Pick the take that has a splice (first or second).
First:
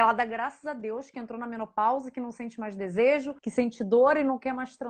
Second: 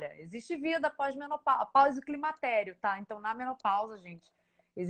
first